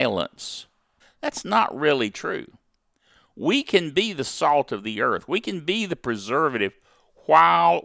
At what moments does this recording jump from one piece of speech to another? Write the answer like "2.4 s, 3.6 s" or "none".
1.0 s